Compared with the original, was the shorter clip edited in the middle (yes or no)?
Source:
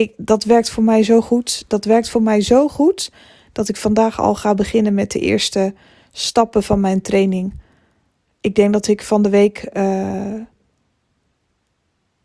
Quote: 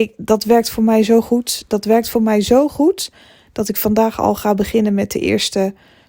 no